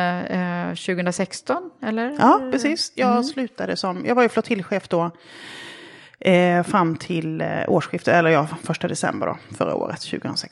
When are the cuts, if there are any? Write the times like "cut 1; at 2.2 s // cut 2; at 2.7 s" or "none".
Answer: none